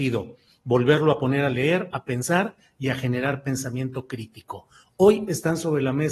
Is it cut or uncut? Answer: cut